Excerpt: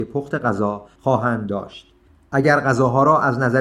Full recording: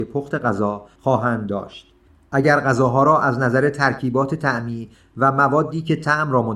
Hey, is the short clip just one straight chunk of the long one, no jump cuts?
yes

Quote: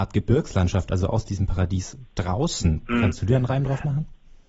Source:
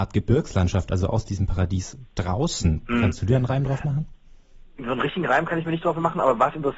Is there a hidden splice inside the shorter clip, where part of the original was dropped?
no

